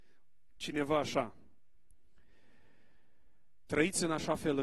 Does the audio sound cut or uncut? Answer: uncut